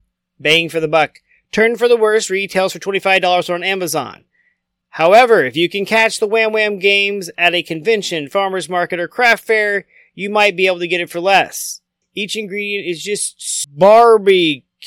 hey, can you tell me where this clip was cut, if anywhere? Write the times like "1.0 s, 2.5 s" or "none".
12.0 s, 13.6 s